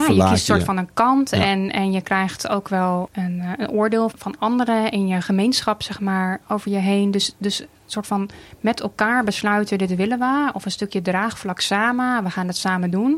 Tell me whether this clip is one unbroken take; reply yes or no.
no